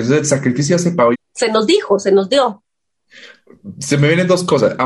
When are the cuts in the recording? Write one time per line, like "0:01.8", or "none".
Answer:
0:01.1

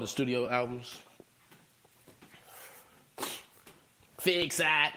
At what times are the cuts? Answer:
0:04.0

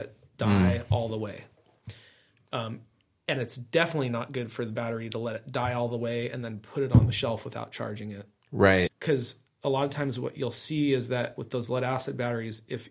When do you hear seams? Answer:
0:08.9
0:11.4

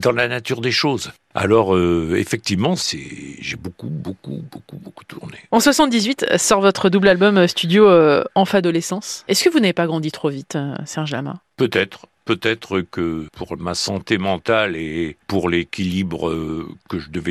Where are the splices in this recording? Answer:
none

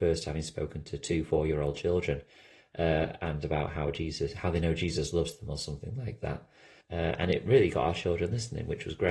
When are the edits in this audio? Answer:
0:06.8

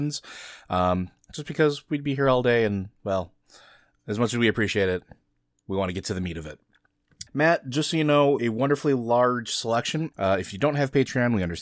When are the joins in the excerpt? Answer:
0:07.3
0:08.4
0:10.1

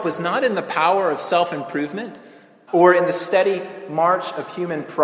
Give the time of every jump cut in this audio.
0:02.7

